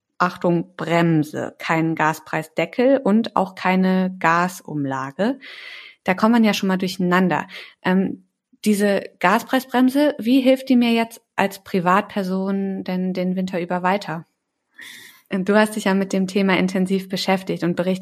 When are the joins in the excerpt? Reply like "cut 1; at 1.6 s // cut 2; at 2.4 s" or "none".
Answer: cut 1; at 15.3 s